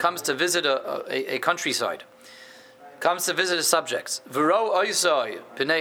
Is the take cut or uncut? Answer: uncut